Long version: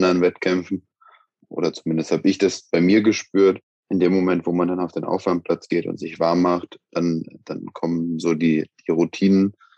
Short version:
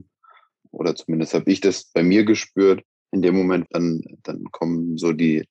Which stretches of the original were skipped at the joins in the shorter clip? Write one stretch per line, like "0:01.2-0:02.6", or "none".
0:04.4-0:06.9